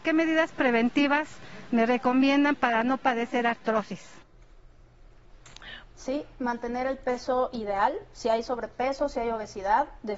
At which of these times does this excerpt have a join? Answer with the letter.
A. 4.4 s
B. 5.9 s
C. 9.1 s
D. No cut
B